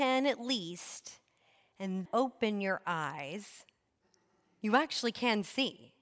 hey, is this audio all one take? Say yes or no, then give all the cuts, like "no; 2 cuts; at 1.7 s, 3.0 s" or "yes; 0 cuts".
no; 1 cut; at 2.1 s